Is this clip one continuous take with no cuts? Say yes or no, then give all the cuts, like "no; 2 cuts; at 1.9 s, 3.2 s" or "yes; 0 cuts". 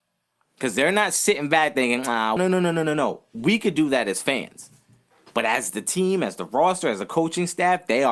no; 1 cut; at 2.4 s